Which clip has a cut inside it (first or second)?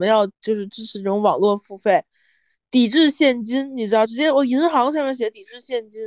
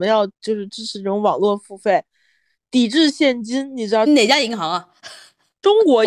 second